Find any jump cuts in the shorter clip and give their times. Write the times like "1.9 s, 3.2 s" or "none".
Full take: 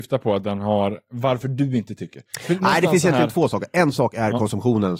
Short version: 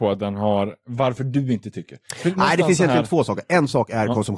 none